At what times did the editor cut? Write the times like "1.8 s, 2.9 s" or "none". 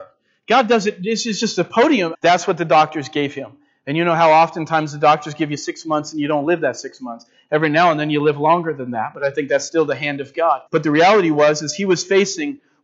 2.1 s, 10.7 s